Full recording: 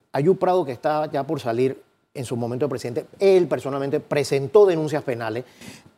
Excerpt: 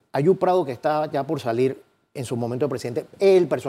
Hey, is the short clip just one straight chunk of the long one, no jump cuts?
yes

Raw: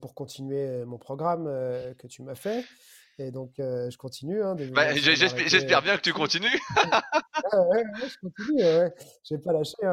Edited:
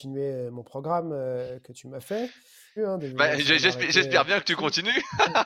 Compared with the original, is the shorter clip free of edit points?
no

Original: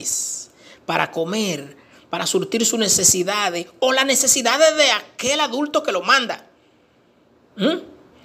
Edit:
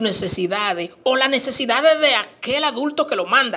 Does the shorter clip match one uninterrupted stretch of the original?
yes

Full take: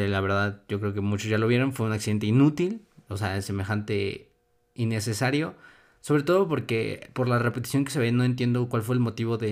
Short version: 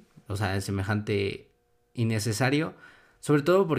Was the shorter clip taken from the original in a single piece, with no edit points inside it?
yes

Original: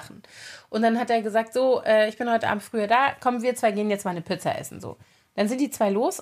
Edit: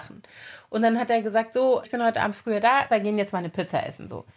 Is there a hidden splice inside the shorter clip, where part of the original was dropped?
yes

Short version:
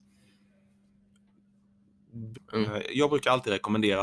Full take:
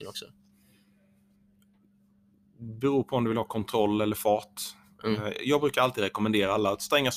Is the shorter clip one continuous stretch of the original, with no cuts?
no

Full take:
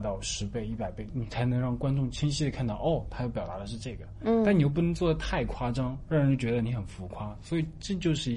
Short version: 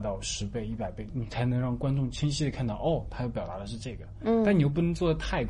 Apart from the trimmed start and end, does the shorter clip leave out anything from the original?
no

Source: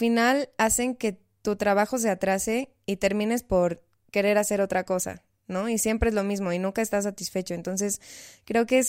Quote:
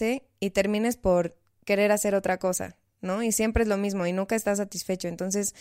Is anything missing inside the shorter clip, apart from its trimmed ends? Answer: no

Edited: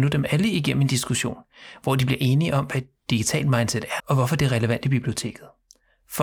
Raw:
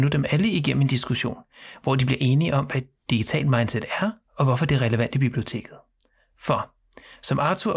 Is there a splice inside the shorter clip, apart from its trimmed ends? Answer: yes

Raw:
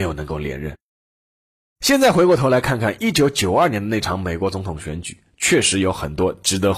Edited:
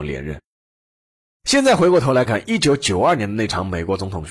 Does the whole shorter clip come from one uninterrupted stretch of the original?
no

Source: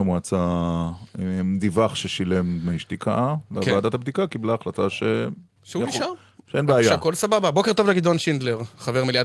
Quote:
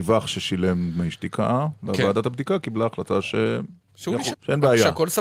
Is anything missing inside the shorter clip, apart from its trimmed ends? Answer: yes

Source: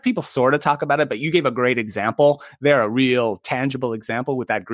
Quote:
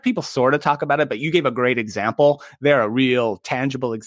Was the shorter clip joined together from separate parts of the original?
no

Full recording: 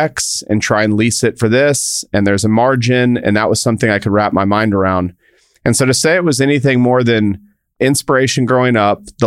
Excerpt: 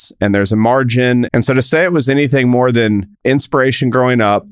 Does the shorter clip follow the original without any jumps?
no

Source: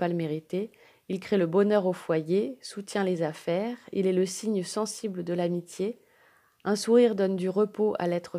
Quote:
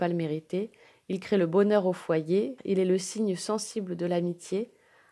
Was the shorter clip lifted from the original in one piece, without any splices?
no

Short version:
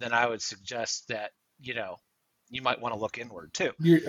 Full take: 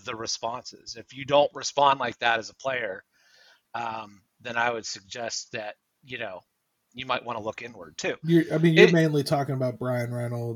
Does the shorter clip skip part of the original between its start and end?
no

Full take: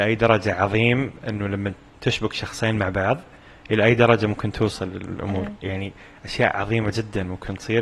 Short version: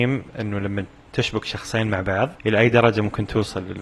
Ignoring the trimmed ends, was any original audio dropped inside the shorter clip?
yes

